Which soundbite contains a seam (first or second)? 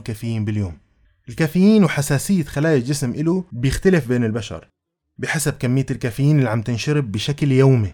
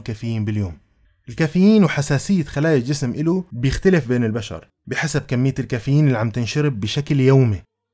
second